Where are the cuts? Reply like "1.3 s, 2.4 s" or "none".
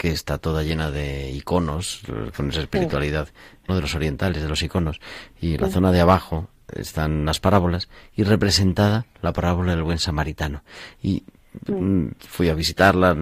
3.7 s